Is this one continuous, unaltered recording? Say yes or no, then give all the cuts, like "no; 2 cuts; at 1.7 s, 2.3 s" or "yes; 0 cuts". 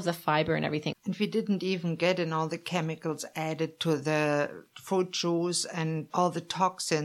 no; 2 cuts; at 0.9 s, 6.1 s